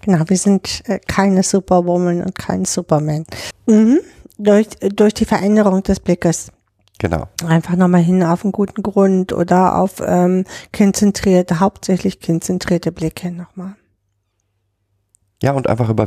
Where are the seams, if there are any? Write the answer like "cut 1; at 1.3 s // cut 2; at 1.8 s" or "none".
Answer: cut 1; at 3.5 s